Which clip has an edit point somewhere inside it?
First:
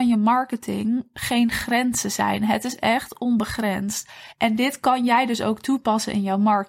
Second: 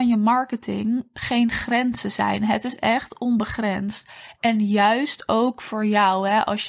first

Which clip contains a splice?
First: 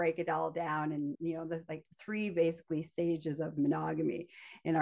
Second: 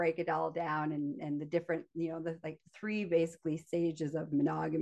first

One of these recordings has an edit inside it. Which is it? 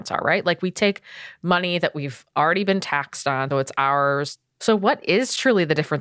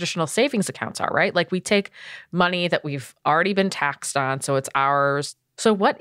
first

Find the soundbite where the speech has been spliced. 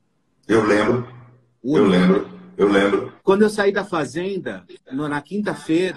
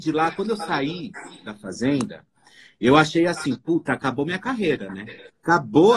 first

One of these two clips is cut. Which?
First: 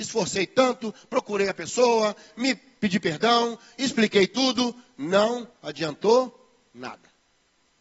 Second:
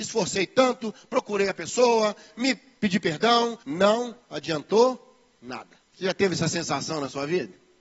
second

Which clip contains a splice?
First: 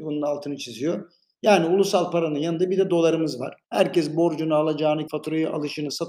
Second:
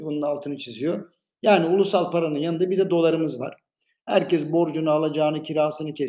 first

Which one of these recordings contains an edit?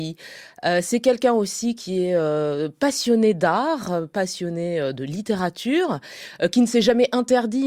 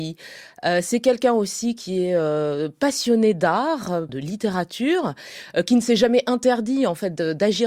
second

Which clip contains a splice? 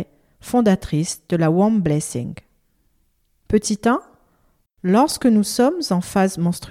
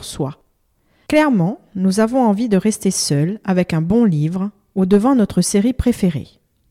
first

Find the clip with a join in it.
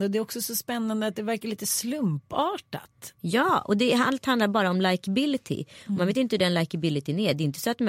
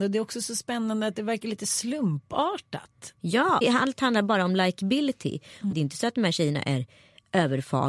second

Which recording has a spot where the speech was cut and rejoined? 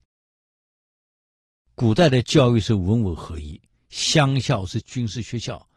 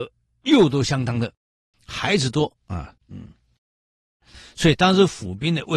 second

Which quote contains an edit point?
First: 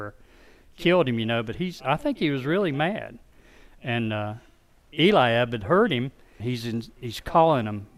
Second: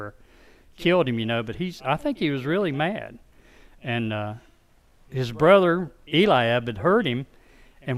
first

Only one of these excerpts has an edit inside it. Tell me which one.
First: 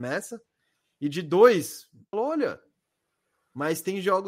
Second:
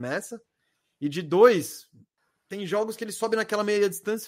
first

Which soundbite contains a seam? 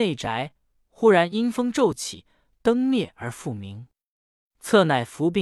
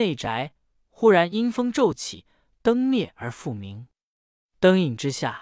first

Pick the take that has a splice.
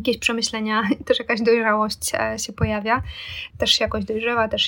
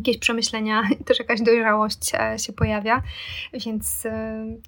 first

